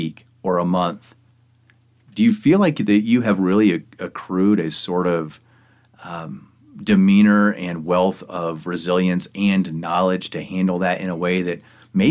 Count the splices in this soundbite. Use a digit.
0